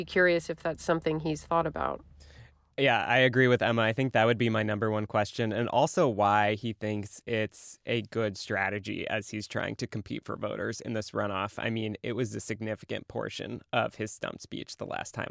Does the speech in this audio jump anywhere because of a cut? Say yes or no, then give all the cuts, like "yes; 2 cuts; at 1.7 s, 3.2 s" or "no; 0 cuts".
no; 0 cuts